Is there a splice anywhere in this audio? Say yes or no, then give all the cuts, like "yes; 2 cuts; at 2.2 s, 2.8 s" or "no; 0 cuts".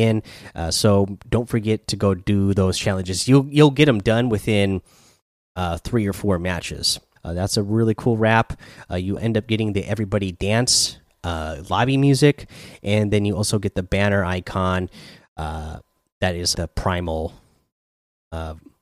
yes; 3 cuts; at 7.2 s, 9.2 s, 16.5 s